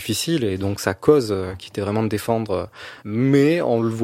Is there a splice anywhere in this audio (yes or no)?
yes